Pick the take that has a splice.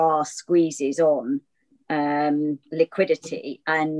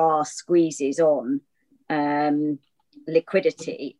first; 1 cut; at 2.7 s

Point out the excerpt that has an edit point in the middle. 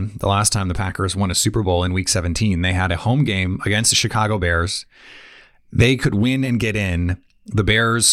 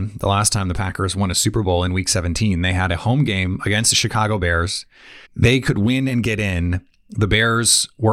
second; 1 cut; at 5.2 s

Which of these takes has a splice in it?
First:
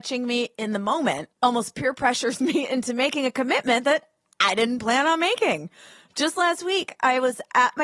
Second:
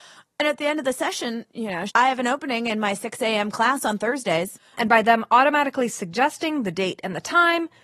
second; 2 cuts; at 1.9 s, 4.7 s

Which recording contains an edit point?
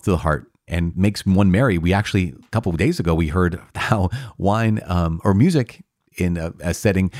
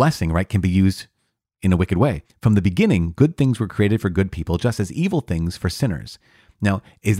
second; 1 cut; at 2.2 s

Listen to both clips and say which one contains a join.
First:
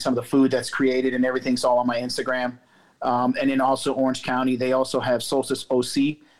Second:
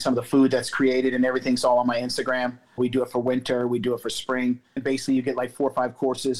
second; 2 cuts; at 2.8 s, 4.8 s

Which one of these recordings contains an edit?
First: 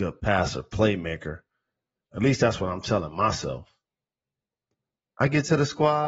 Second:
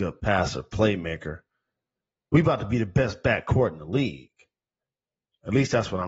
first; 1 cut; at 2.1 s

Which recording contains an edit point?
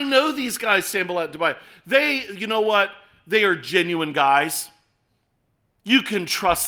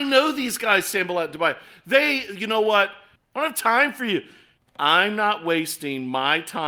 second; 2 cuts; at 3.2 s, 4.6 s

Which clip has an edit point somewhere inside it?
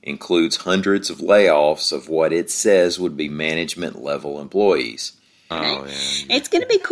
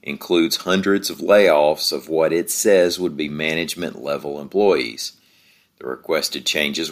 first; 1 cut; at 5.5 s

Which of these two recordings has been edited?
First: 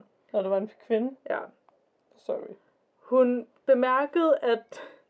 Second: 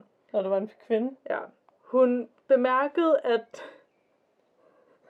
second; 1 cut; at 1.8 s

